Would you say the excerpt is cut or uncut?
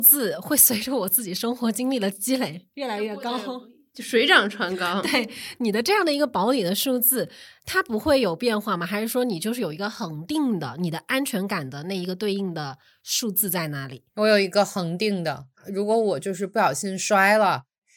cut